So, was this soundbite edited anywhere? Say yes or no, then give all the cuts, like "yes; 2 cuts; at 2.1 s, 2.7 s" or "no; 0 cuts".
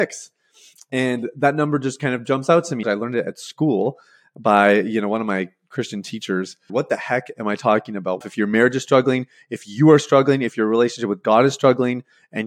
yes; 3 cuts; at 2.8 s, 6.7 s, 8.2 s